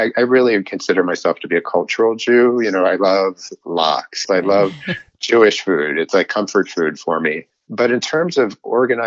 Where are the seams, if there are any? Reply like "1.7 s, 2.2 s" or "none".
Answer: 4.2 s